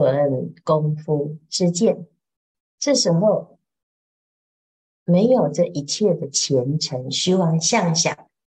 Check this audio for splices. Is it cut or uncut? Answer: cut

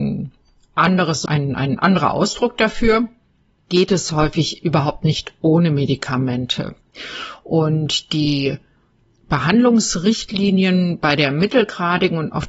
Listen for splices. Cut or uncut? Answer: cut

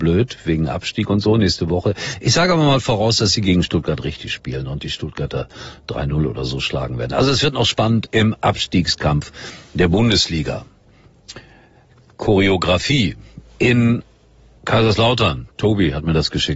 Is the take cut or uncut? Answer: uncut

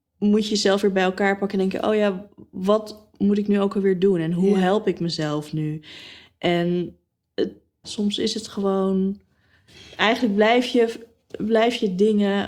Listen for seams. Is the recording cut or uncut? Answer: cut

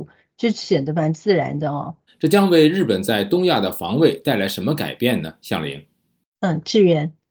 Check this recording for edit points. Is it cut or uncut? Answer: cut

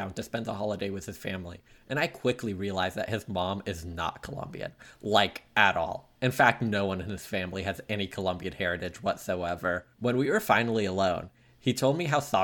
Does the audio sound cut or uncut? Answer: cut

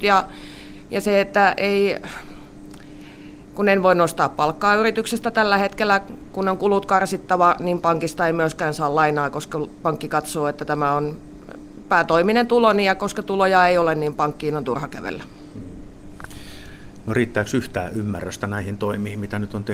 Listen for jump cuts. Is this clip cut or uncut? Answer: uncut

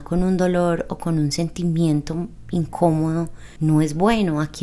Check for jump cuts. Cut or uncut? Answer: uncut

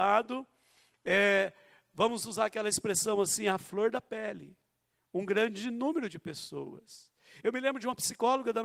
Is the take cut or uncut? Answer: uncut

